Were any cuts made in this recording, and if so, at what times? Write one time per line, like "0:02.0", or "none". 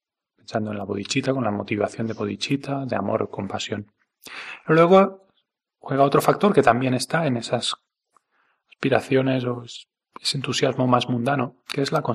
none

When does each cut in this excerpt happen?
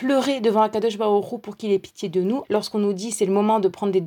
0:02.4

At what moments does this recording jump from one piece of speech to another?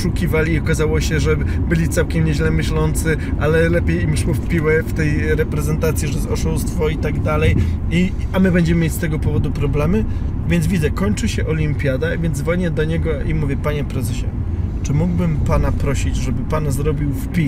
none

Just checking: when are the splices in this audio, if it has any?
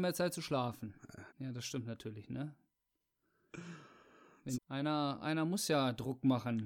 0:01.3
0:04.5

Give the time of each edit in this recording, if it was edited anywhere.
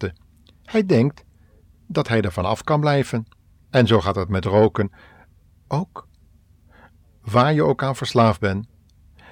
none

